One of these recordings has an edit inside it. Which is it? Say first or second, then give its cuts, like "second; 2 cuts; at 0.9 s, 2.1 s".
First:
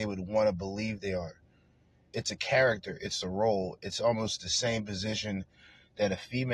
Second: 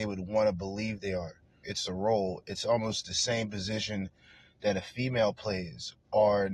second; 1 cut; at 1.6 s